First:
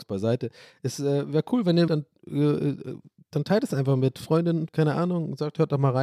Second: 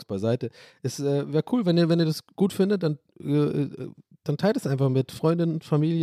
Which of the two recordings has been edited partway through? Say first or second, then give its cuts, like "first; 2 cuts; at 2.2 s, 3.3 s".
first; 2 cuts; at 1.9 s, 4.7 s